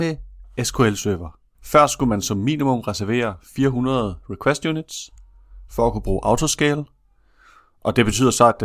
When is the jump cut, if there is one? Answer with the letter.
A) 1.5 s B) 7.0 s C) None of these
A